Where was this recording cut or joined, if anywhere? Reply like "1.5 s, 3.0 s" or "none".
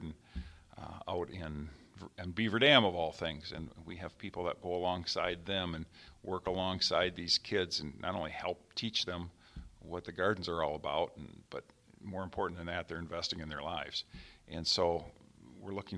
none

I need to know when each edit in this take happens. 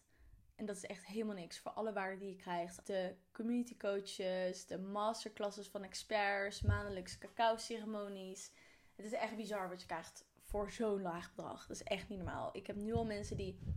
2.8 s

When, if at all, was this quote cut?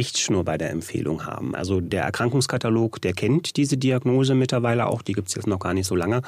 1.5 s

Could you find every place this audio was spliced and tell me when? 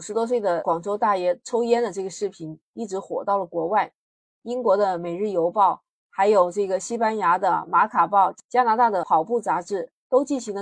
none

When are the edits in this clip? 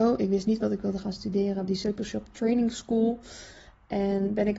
1.7 s

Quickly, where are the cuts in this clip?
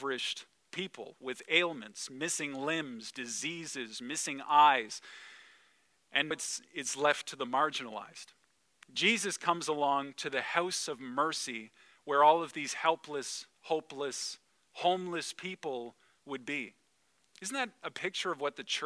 6.3 s

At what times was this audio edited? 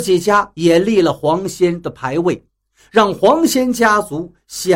none

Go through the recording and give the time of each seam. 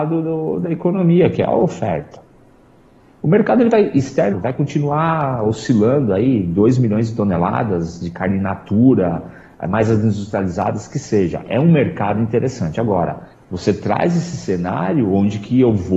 3.0 s, 4.3 s, 13.3 s

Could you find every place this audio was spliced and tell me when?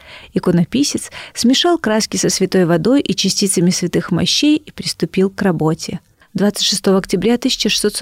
6.2 s

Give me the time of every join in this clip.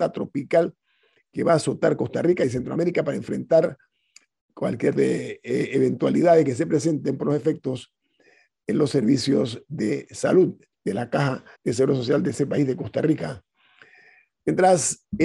5.0 s, 11.5 s

